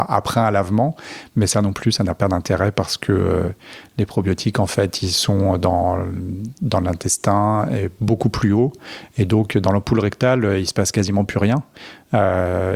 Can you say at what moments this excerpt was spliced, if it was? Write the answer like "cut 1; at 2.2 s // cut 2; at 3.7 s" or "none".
none